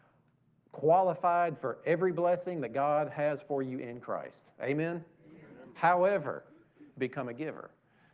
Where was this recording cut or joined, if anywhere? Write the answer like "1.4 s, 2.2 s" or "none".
6.9 s